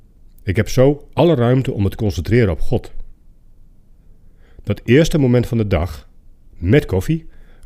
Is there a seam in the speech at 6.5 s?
yes; 1 cut; at 6.5 s

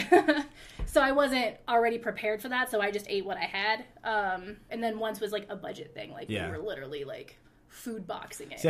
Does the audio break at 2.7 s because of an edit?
no; 1 cut; at 4.7 s

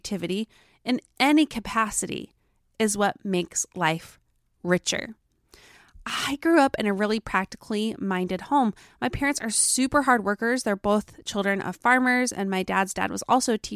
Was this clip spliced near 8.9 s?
no; 0 cuts

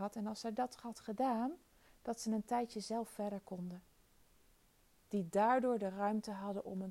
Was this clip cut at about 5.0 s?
yes; 1 cut; at 5.0 s

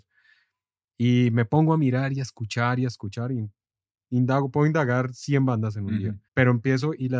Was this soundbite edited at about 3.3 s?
no; 1 cut; at 6.3 s

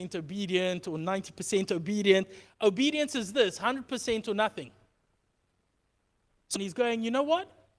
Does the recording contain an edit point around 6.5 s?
yes; 1 cut; at 6.5 s

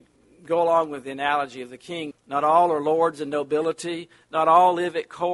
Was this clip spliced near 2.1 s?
yes; 1 cut; at 2.1 s

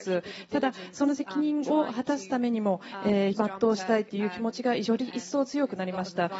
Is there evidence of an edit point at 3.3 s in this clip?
yes; 1 cut; at 3.3 s

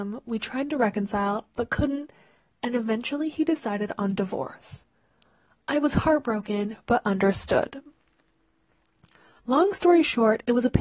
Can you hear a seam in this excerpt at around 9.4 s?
yes; 1 cut; at 9.4 s

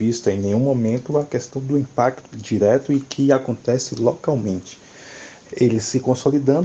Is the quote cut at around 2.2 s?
yes; 2 cuts; at 2.2 s, 5.5 s

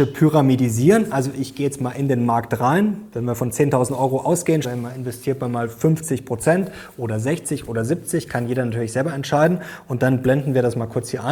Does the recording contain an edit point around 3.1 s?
no; 1 cut; at 4.6 s

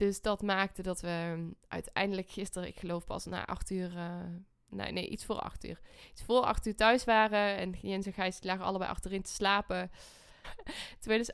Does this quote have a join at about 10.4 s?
yes; 1 cut; at 10.4 s

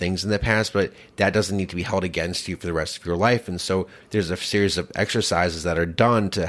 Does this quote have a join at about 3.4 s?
no; 0 cuts

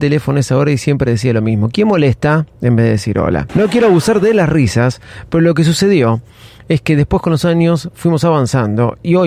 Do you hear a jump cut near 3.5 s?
yes; 1 cut; at 3.5 s

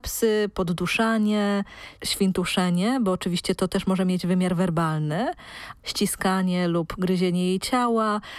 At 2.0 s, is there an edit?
yes; 2 cuts; at 2.0 s, 5.8 s

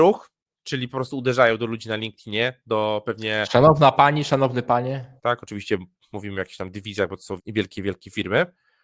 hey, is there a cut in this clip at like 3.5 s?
no; 2 cuts; at 5.2 s, 7.4 s

